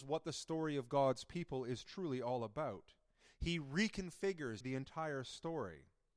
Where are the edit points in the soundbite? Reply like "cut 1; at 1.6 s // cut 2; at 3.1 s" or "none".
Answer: cut 1; at 4.6 s